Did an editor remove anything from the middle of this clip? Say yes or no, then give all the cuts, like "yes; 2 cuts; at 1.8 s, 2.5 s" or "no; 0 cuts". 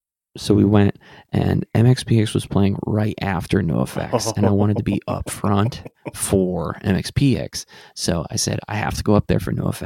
no; 0 cuts